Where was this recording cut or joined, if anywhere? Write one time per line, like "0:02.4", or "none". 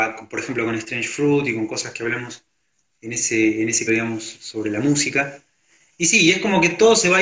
0:03.9